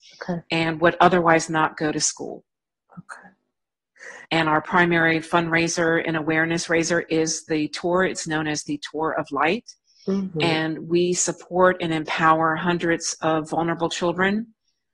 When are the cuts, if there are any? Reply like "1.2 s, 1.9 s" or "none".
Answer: 4.2 s